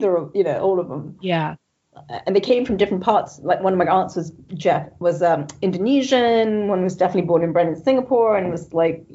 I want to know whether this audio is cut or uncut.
uncut